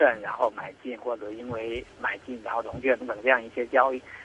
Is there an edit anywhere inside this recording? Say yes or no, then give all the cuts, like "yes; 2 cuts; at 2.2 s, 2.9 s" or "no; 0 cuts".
yes; 1 cut; at 3.0 s